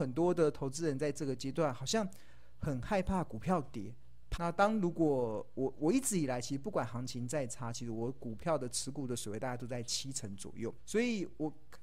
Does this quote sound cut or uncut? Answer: cut